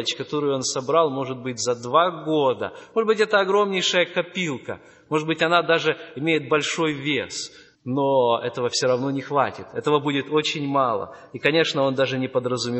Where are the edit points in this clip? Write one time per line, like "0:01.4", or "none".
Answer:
0:07.8

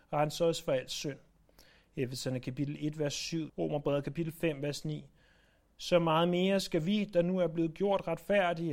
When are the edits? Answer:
0:03.5

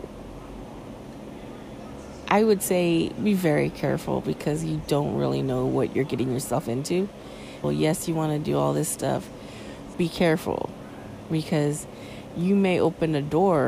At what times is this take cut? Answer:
0:07.6
0:09.9

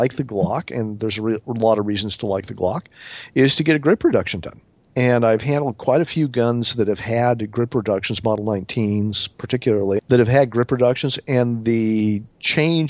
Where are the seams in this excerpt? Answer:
0:10.0

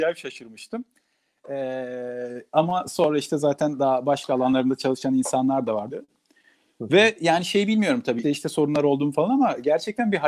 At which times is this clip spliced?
0:05.9
0:08.2

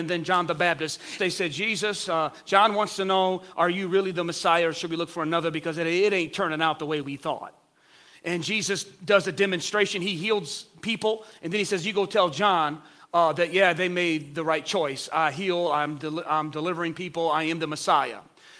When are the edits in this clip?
0:01.2

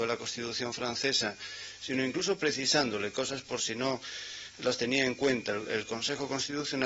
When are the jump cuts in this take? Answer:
0:05.6

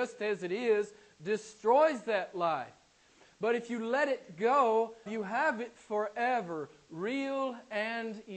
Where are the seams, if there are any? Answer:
0:05.1

